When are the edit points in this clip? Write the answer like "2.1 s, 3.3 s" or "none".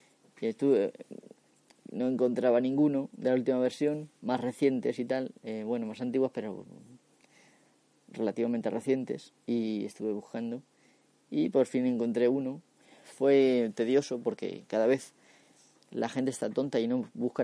4.2 s